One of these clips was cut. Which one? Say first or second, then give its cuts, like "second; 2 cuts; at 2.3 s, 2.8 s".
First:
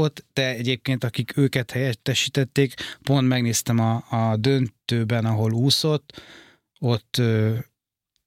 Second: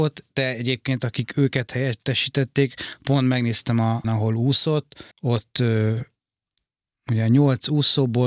second; 2 cuts; at 4.0 s, 5.1 s